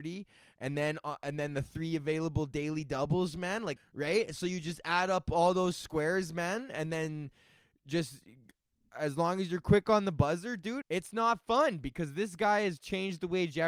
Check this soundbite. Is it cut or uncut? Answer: cut